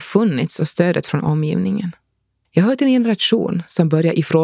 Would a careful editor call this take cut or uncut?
cut